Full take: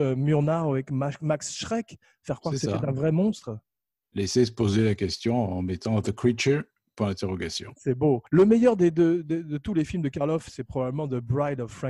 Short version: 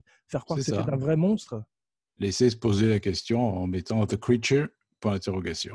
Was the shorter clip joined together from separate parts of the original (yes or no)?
no